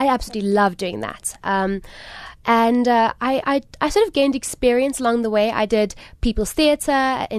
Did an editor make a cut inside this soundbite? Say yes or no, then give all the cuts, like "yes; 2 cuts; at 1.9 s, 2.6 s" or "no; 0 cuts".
no; 0 cuts